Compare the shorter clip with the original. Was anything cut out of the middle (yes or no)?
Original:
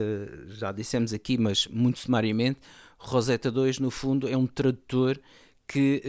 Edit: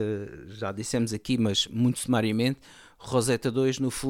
no